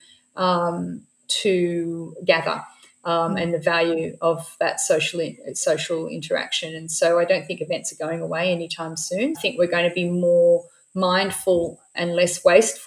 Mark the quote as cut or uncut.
cut